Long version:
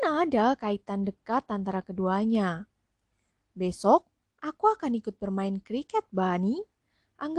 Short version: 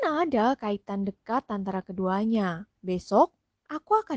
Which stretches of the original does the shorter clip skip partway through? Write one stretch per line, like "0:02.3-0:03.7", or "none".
0:02.8-0:03.5